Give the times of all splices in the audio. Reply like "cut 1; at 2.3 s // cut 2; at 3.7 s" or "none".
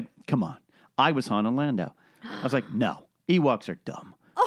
cut 1; at 3.2 s